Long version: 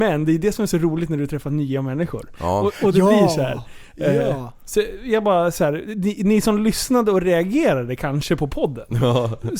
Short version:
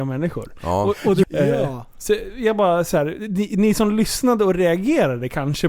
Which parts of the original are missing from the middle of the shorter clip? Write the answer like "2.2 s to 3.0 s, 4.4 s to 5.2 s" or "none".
3.0 s to 3.9 s

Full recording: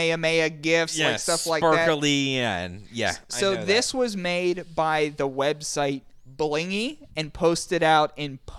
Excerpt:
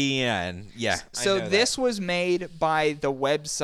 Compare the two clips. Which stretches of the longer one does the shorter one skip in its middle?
none

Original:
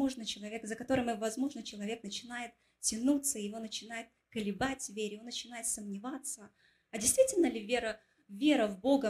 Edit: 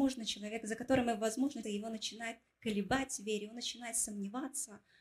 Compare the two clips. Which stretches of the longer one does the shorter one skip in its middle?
1.6 s to 3.3 s

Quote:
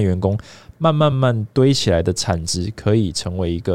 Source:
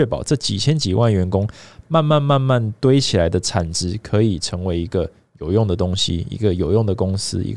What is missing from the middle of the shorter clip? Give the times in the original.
2.2 s to 2.4 s

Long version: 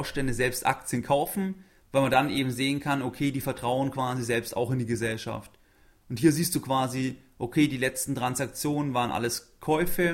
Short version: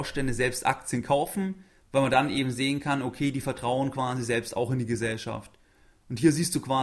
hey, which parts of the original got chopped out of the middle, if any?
none

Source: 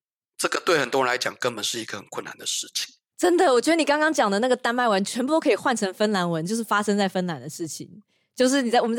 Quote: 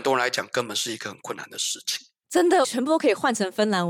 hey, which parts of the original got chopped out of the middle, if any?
3.5 s to 5.0 s

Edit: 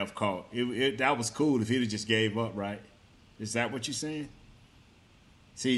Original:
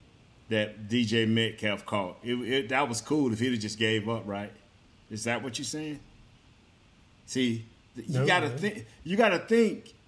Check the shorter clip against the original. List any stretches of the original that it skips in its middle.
none

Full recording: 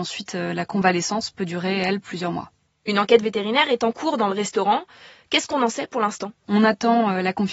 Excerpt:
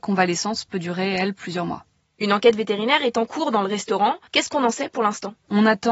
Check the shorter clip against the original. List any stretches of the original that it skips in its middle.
4.9 s to 5.2 s

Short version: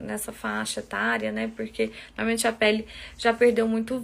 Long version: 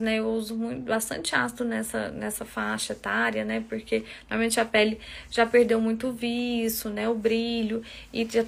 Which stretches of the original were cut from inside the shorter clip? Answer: none

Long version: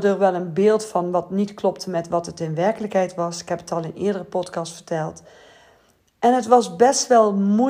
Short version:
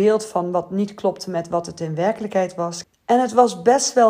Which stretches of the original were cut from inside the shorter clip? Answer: 3.4 s to 6.0 s

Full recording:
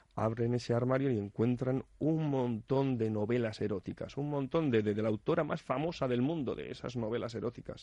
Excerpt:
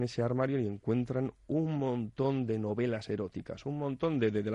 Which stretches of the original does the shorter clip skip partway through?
none

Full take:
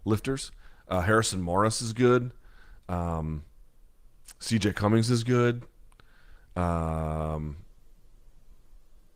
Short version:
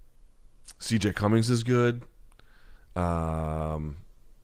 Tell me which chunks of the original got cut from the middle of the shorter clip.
none

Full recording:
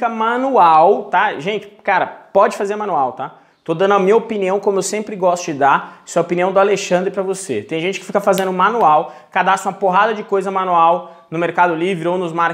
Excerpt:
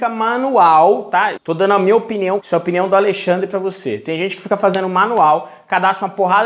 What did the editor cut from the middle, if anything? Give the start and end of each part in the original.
1.4 s to 3.6 s, 4.6 s to 6.0 s

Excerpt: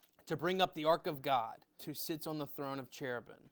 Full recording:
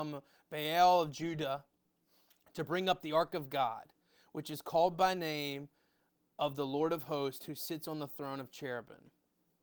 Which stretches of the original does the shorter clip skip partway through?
4.1 s to 7.4 s

